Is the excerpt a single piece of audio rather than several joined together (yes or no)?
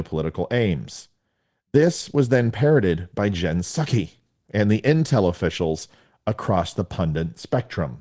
yes